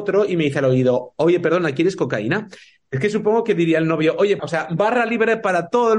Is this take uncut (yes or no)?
no